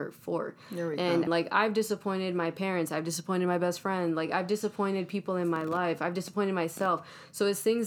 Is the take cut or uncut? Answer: cut